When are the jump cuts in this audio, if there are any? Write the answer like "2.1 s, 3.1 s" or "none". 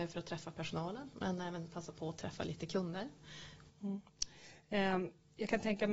3.7 s